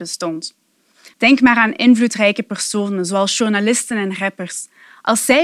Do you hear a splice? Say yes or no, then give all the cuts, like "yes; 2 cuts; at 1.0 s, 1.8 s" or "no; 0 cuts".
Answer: yes; 1 cut; at 1.1 s